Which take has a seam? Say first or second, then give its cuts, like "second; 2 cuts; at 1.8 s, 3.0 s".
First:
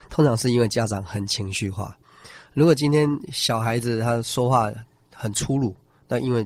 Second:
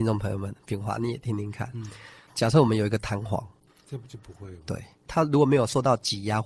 second; 2 cuts; at 3.7 s, 5.1 s